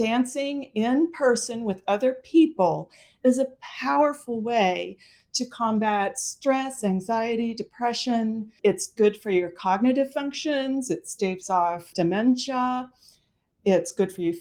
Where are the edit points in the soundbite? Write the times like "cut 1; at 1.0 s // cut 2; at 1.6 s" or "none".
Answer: none